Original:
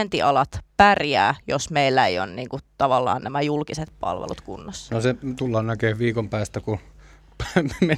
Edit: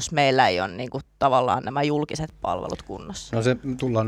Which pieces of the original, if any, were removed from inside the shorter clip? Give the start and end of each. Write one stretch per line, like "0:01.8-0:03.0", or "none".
none